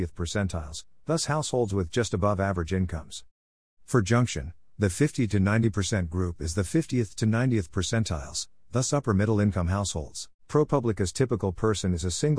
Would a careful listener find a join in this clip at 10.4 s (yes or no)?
yes